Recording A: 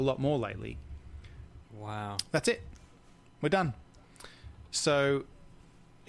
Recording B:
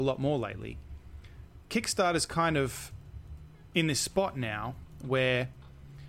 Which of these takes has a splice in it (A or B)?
A